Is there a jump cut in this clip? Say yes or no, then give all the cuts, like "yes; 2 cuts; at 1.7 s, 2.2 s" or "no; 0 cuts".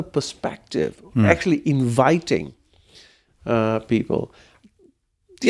no; 0 cuts